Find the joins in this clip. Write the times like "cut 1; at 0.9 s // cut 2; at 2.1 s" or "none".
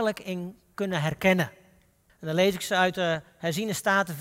cut 1; at 2.1 s

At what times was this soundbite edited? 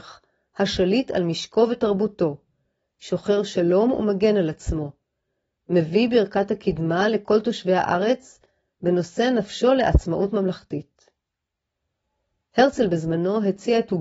none

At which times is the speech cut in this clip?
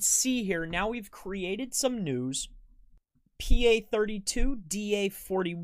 none

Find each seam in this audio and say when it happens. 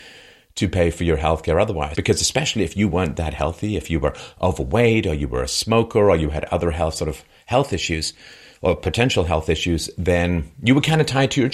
cut 1; at 1.9 s

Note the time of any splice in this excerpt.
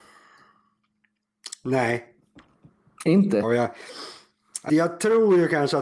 cut 1; at 3.4 s // cut 2; at 4.7 s

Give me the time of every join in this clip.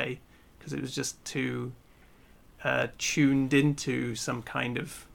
none

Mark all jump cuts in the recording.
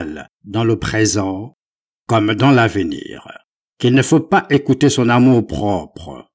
none

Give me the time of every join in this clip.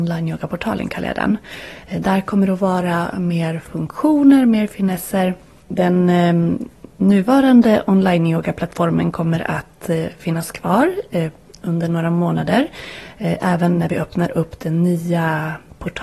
cut 1; at 5.6 s

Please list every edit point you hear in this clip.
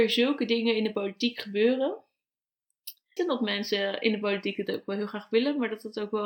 cut 1; at 3.2 s

